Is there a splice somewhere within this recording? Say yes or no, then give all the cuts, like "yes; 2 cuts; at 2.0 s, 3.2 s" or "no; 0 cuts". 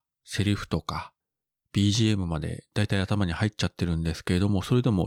no; 0 cuts